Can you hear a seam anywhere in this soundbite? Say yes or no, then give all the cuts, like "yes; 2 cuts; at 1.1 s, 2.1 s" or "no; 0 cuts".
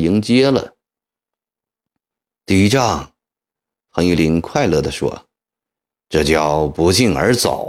yes; 1 cut; at 3.6 s